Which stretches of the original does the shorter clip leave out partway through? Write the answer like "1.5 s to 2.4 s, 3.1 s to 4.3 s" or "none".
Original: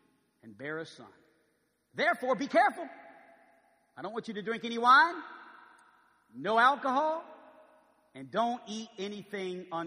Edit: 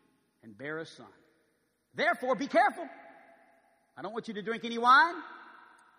none